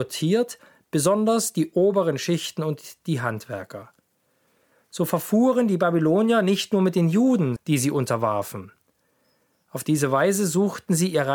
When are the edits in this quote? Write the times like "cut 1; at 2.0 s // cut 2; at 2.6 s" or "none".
cut 1; at 7.6 s